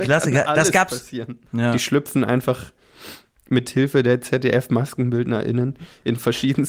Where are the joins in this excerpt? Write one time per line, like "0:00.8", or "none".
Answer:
0:01.5